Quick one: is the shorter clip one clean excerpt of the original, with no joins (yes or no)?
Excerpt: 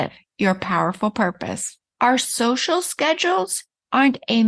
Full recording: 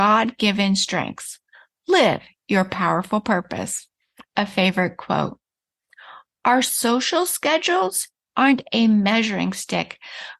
no